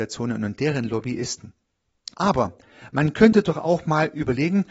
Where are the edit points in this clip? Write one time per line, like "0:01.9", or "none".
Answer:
0:02.1